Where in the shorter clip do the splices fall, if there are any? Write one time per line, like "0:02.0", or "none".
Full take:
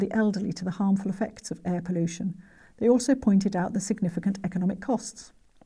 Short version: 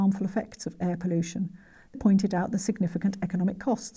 0:01.9